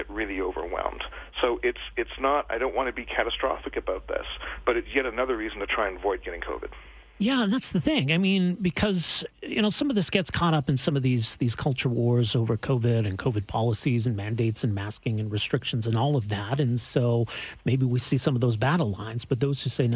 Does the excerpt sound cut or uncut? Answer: uncut